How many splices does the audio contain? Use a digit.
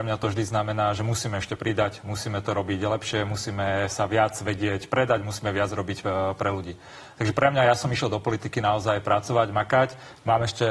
0